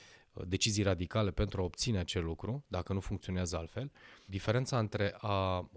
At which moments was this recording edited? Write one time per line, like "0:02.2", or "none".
0:04.3